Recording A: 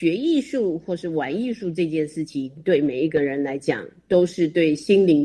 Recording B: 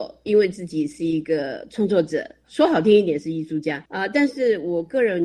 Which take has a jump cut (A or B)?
B